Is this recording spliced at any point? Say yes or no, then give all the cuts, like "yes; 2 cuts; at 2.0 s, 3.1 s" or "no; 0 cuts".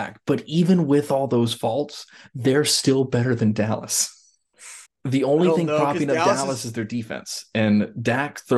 yes; 1 cut; at 4.9 s